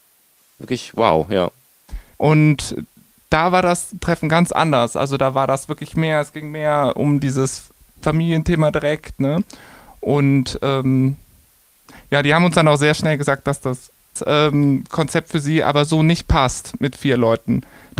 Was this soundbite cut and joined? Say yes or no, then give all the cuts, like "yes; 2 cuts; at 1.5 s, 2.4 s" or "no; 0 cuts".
yes; 1 cut; at 2.1 s